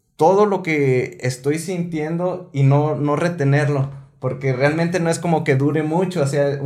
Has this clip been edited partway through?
no; 0 cuts

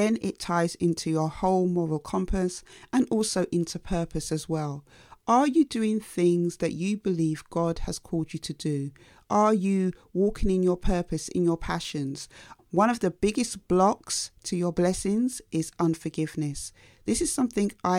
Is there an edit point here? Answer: yes; 1 cut; at 12.6 s

